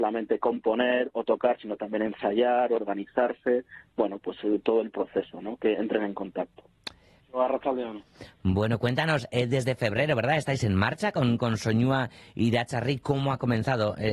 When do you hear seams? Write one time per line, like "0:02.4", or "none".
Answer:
0:07.2